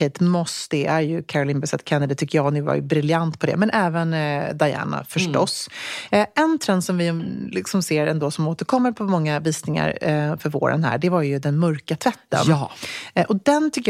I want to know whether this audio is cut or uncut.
uncut